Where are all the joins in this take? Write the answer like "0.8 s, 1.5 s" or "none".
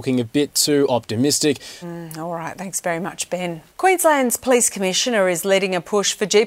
1.8 s, 3.7 s

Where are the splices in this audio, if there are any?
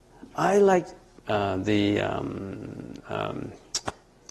1.2 s, 3.0 s

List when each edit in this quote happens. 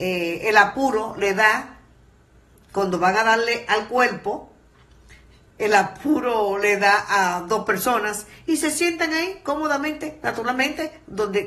none

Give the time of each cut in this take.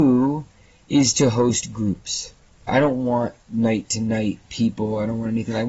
2.7 s

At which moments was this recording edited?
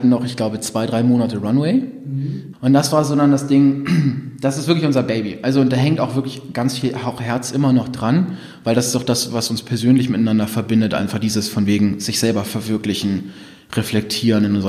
2.5 s

